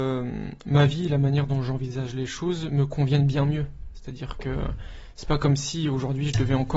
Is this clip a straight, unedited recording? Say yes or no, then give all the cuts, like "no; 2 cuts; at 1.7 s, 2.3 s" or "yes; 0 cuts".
yes; 0 cuts